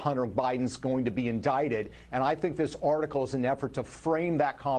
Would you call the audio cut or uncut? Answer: uncut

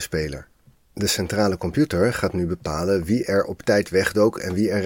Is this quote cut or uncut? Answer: uncut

